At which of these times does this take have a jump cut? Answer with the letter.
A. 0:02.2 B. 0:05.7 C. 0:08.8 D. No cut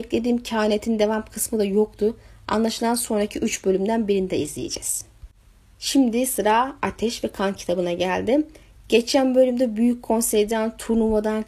D